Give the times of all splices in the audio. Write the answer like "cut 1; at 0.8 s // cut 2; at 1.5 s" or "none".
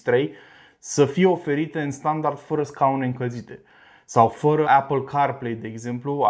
cut 1; at 4.6 s